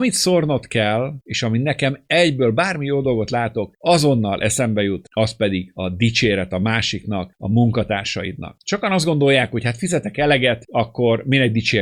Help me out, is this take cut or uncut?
cut